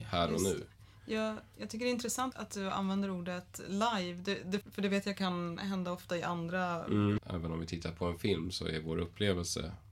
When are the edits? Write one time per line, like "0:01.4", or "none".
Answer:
0:02.3
0:04.6
0:07.2